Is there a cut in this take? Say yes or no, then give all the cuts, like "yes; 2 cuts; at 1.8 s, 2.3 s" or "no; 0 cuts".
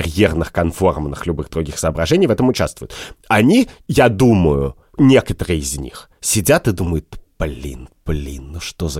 yes; 1 cut; at 3.1 s